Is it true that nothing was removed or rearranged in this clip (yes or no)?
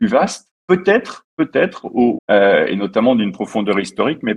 no